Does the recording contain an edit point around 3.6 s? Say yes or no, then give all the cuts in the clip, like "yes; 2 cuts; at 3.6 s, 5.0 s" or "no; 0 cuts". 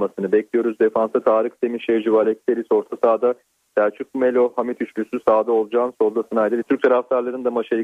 no; 1 cut; at 6.6 s